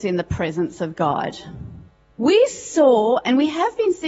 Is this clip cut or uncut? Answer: uncut